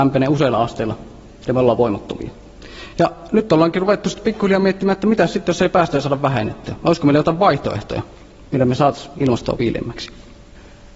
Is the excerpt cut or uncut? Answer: uncut